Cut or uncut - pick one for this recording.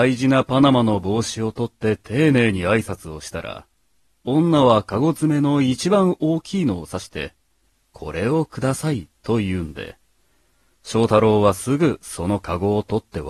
uncut